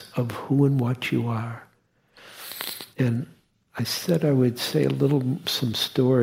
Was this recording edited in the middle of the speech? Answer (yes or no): yes